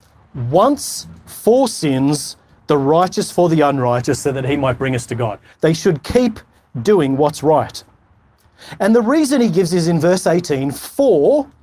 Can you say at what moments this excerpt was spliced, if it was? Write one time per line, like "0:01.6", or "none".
0:05.5